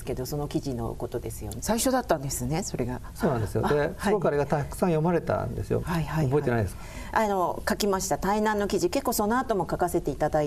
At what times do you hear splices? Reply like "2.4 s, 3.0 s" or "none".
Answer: 1.6 s, 5.8 s